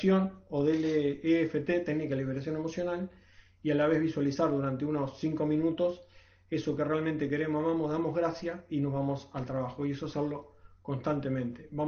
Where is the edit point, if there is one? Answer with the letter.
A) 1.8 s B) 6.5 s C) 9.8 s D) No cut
D